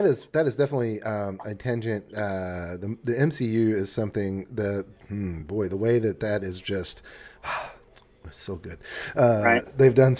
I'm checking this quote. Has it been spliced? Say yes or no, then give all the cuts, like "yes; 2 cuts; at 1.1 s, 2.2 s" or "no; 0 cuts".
no; 0 cuts